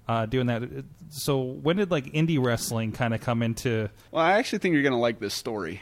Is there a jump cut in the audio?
yes; 1 cut; at 4.1 s

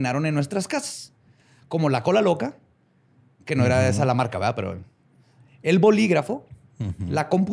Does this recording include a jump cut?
no; 0 cuts

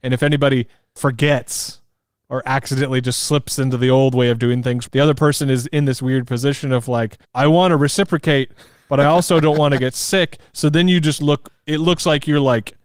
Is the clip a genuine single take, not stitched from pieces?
no; 2 cuts; at 4.9 s, 7.2 s

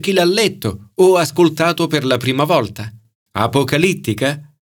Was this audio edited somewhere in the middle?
yes; 1 cut; at 3.2 s

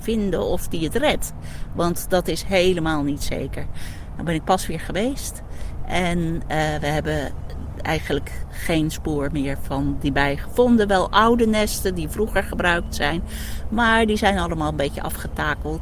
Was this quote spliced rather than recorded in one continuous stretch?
no; 0 cuts

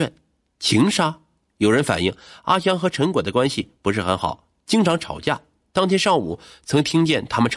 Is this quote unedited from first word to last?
yes; 0 cuts

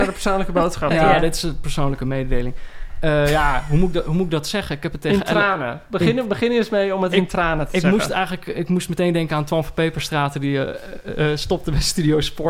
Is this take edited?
no; 0 cuts

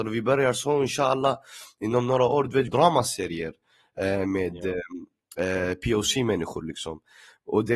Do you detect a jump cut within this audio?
yes; 1 cut; at 2.7 s

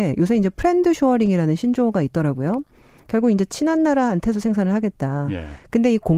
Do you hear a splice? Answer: no; 0 cuts

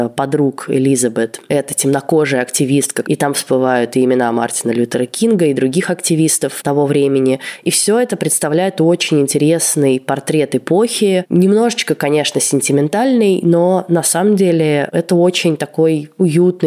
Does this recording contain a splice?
yes; 1 cut; at 3.0 s

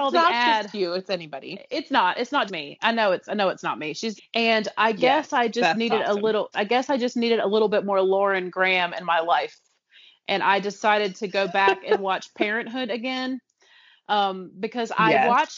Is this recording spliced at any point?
yes; 3 cuts; at 2.5 s, 4.2 s, 6.5 s

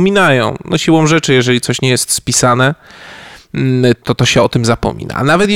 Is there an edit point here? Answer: yes; 1 cut; at 4.0 s

